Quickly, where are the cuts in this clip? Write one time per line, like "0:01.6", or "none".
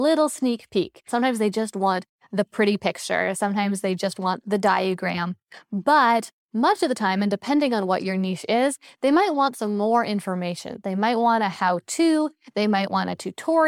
0:01.1